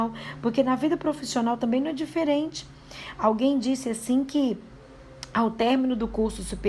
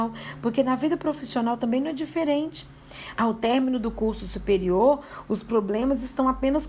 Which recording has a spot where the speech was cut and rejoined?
second; 1 cut; at 3.2 s

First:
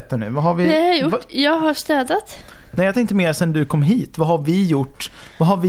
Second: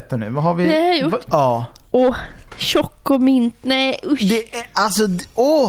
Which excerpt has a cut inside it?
second; 1 cut; at 1.3 s

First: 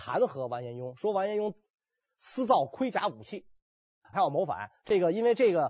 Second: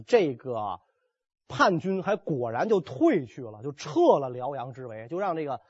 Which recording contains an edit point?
first; 1 cut; at 4.1 s

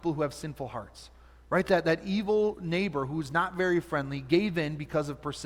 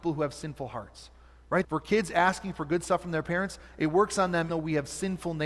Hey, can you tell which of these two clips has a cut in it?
second; 2 cuts; at 1.6 s, 4.5 s

